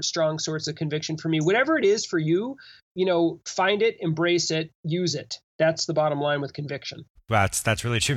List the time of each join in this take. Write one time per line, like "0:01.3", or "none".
0:07.2